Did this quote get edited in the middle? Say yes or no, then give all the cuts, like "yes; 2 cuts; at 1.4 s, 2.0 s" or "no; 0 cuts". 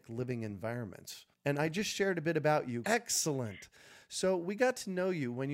yes; 2 cuts; at 1.3 s, 2.8 s